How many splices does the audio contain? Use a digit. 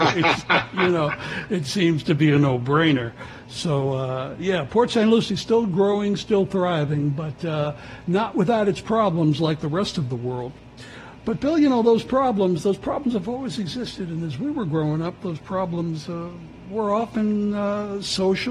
0